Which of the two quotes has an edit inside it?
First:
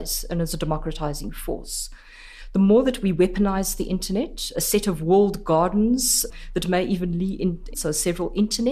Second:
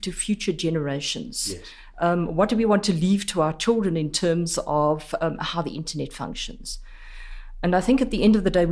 first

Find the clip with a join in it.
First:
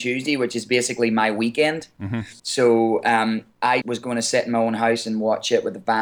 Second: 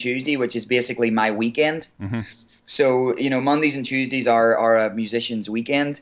first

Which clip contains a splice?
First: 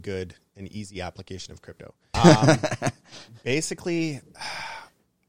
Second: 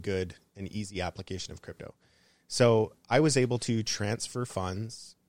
first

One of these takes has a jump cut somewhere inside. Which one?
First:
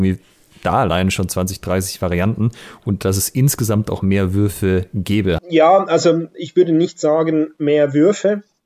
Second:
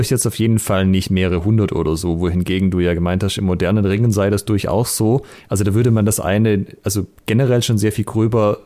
first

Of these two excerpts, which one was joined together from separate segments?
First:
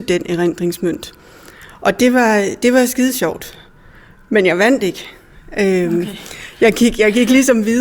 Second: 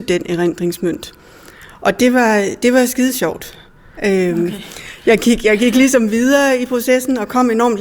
second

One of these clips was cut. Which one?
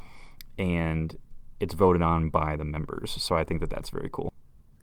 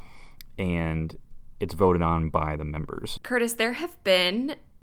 second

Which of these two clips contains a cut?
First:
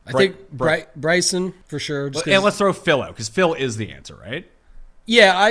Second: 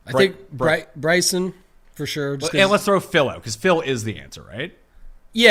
first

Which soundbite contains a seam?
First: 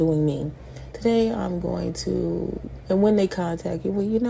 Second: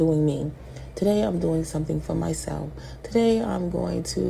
first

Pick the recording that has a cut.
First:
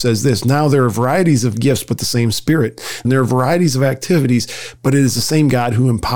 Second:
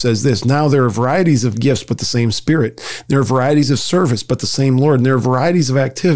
first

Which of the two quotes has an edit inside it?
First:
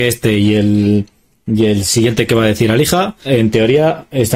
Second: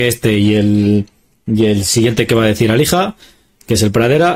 first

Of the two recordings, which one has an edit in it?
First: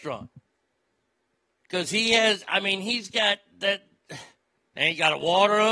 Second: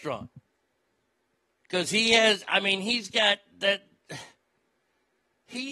first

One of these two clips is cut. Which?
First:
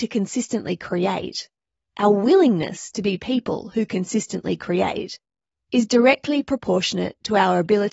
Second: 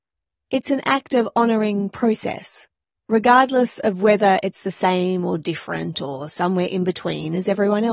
second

